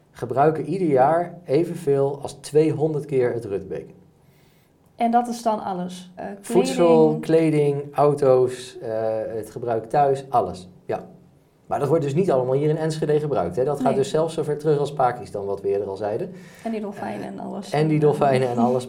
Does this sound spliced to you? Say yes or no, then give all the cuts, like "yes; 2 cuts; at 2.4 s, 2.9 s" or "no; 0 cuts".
yes; 1 cut; at 6.2 s